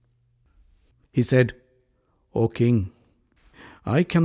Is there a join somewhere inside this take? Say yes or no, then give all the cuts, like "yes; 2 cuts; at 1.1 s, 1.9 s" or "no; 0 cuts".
yes; 1 cut; at 1.0 s